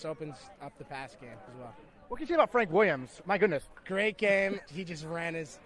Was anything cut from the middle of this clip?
yes; 2 cuts; at 1.5 s, 4.7 s

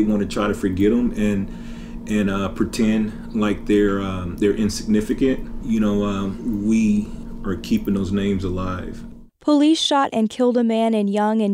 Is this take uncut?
no; 1 cut; at 9.3 s

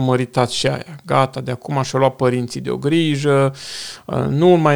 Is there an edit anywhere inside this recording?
no; 0 cuts

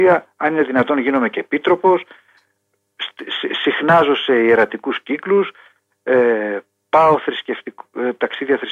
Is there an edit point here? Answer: no; 0 cuts

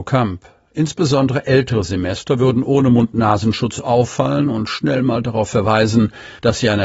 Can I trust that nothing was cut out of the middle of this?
yes; 0 cuts

